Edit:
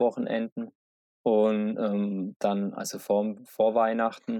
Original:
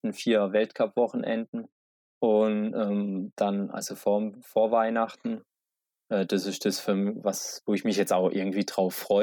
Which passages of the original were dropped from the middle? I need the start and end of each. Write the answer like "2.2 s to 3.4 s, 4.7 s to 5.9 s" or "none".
none